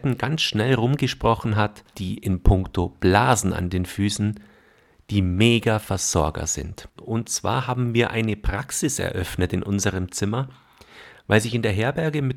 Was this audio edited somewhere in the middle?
yes; 2 cuts; at 1.9 s, 7.0 s

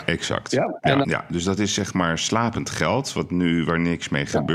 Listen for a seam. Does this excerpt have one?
yes; 1 cut; at 1.0 s

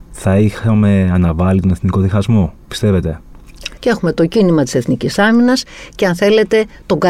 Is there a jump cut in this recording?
yes; 2 cuts; at 2.6 s, 3.8 s

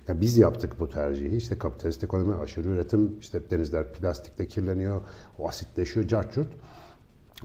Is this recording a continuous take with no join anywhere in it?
yes; 0 cuts

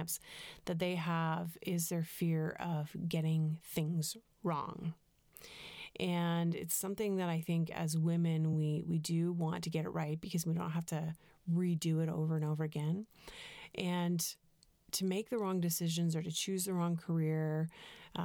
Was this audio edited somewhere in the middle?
no; 0 cuts

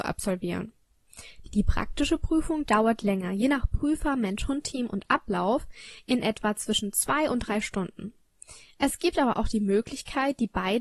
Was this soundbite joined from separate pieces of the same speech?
yes; 1 cut; at 1.5 s

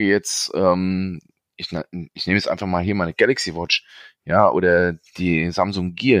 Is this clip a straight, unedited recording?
yes; 0 cuts

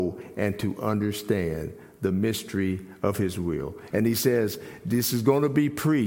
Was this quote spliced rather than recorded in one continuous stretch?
yes; 1 cut; at 3.9 s

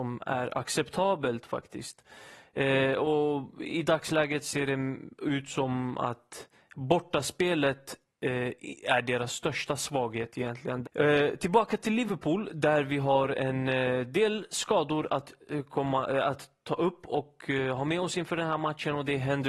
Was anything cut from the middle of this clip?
yes; 1 cut; at 10.8 s

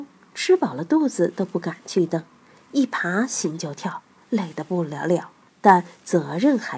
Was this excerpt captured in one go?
no; 1 cut; at 5.5 s

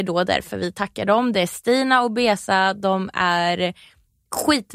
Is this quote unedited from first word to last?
yes; 0 cuts

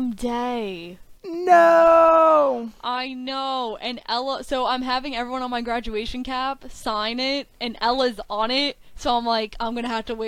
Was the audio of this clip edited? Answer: yes; 1 cut; at 1.2 s

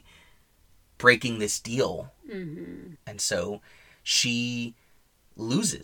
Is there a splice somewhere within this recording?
yes; 1 cut; at 3.0 s

